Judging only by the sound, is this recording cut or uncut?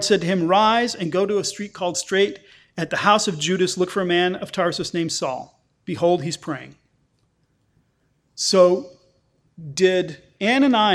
uncut